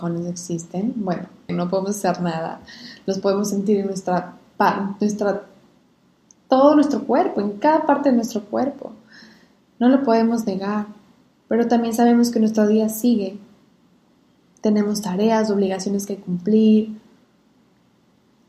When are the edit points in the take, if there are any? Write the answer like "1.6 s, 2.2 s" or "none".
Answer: 1.5 s